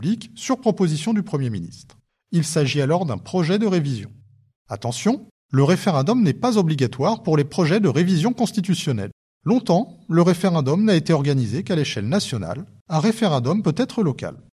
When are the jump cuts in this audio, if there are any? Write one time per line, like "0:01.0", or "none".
0:04.6
0:09.3
0:12.8